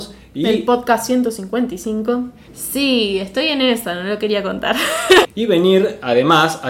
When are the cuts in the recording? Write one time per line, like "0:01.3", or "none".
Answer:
0:02.5
0:05.2